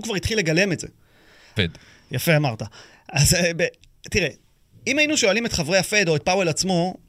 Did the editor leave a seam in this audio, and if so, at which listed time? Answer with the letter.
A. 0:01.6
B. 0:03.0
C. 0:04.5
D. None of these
A